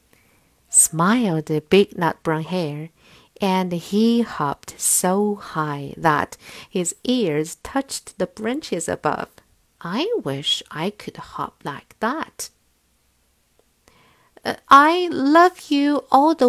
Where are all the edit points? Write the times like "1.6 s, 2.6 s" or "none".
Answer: 9.6 s